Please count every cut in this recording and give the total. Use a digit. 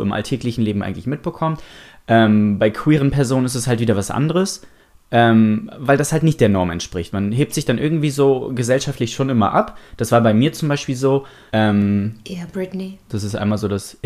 2